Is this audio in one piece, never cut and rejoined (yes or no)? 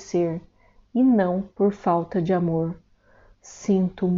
yes